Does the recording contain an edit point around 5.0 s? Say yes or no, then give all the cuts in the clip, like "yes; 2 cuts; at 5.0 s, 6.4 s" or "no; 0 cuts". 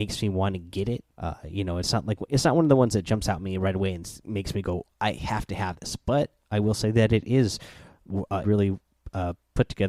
no; 2 cuts; at 1.1 s, 8.4 s